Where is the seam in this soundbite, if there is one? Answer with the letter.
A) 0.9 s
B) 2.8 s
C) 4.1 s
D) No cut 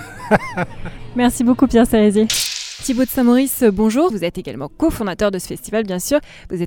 C